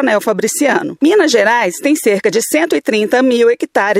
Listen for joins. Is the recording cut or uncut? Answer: cut